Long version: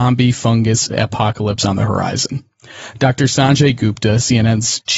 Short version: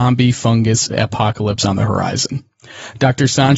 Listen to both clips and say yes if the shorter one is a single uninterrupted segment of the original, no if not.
yes